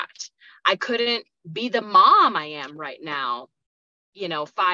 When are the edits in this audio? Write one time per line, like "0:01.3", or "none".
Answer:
none